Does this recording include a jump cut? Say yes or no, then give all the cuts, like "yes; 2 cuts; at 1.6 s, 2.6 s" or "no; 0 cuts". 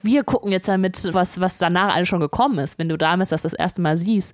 yes; 1 cut; at 1.1 s